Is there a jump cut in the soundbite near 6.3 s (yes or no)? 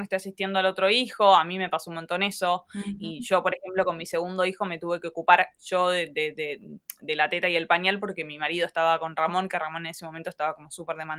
no